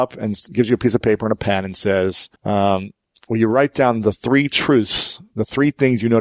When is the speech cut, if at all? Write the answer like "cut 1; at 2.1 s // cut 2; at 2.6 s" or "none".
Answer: cut 1; at 2.4 s